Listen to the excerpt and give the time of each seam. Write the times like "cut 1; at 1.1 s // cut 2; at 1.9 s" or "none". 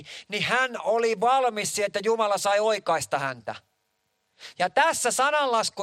cut 1; at 4.5 s